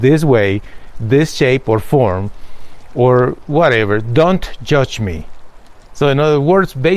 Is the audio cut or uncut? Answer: uncut